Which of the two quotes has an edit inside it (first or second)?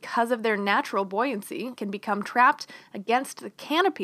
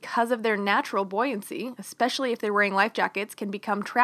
first